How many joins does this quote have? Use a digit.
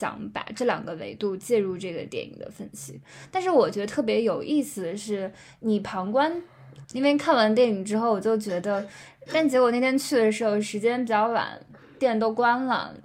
2